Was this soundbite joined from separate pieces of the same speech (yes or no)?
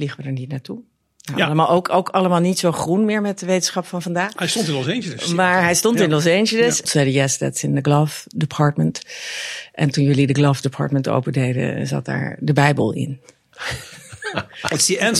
yes